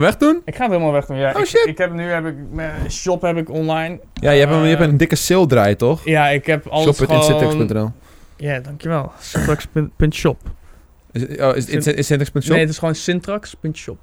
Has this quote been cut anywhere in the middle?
no; 0 cuts

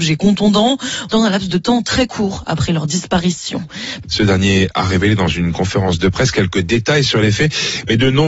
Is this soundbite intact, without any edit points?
no; 2 cuts; at 1.1 s, 4.0 s

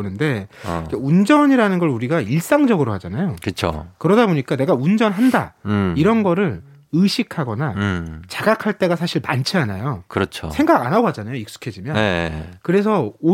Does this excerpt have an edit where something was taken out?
no; 0 cuts

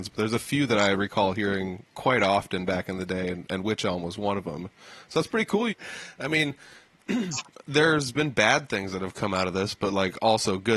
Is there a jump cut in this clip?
yes; 1 cut; at 5.7 s

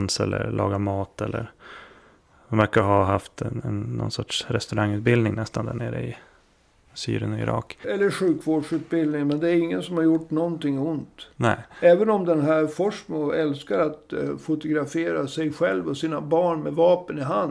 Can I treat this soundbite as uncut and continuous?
no; 1 cut; at 7.8 s

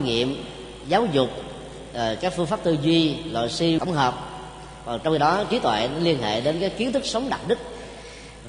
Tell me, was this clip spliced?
yes; 1 cut; at 3.8 s

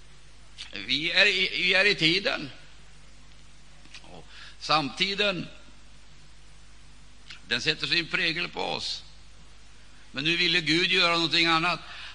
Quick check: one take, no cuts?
yes; 0 cuts

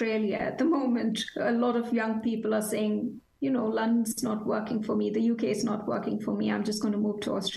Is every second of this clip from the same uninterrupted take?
yes; 0 cuts

